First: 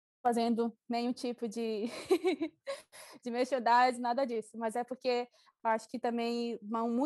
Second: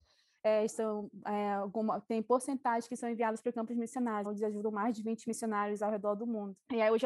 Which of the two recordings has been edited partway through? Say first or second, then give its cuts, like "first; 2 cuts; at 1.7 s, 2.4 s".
second; 1 cut; at 4.2 s